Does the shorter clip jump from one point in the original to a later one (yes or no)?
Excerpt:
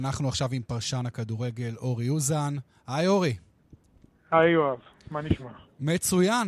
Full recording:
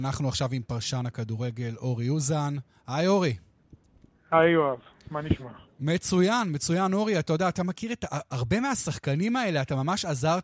no